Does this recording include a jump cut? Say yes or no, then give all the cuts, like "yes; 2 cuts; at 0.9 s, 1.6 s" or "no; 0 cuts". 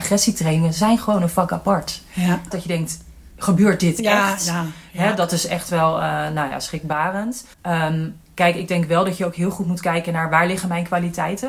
yes; 2 cuts; at 2.5 s, 7.5 s